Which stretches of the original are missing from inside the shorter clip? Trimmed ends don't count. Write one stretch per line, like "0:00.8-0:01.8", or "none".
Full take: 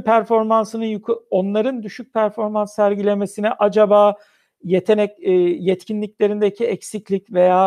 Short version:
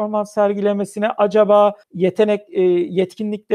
0:04.2-0:04.5